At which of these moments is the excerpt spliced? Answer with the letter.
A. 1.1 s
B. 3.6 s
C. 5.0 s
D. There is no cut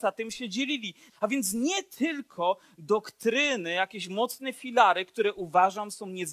A